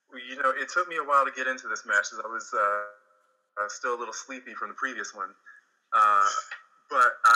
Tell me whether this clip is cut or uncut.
uncut